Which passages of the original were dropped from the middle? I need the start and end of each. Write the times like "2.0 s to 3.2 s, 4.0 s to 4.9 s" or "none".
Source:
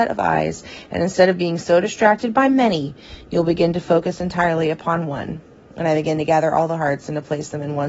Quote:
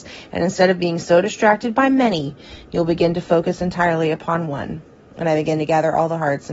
none